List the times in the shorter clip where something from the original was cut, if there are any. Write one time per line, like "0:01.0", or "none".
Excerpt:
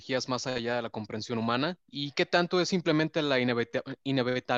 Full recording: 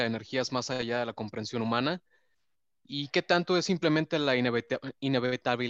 0:01.8